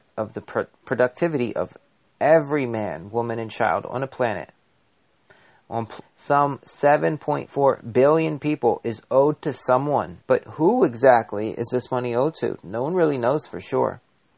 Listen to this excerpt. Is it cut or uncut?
cut